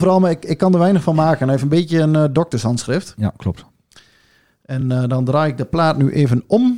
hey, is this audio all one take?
yes; 0 cuts

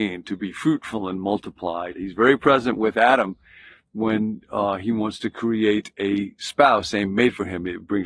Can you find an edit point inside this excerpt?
yes; 1 cut; at 1.9 s

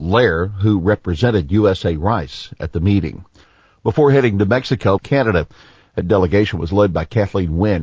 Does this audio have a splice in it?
yes; 1 cut; at 5.0 s

